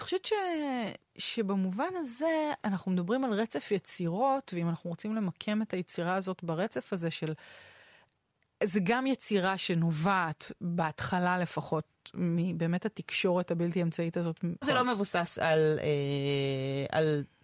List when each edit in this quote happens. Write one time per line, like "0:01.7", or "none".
0:14.6